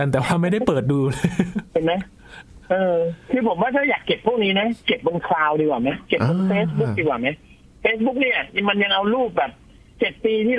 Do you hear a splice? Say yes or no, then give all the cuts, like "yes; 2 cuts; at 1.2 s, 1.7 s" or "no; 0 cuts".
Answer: no; 0 cuts